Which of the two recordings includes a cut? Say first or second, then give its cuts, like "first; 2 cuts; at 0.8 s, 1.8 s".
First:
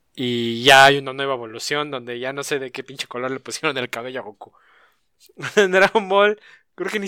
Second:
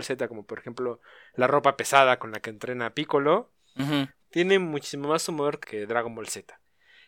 second; 2 cuts; at 4.2 s, 5.6 s